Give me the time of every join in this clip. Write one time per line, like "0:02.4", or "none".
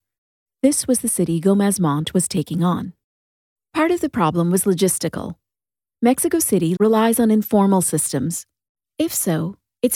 0:06.8
0:08.9